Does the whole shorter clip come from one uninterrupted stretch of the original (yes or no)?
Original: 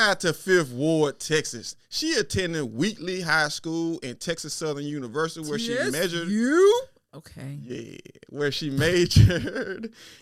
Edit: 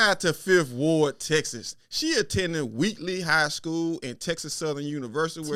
yes